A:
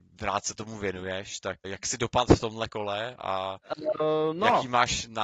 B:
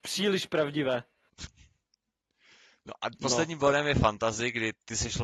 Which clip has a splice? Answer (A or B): A